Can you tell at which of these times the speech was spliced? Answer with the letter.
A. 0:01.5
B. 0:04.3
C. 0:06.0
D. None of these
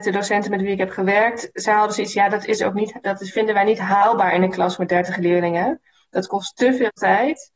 D